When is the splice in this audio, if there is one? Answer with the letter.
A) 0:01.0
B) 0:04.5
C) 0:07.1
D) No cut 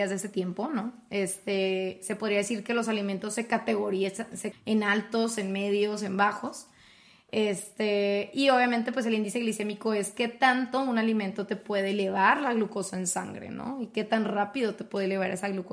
B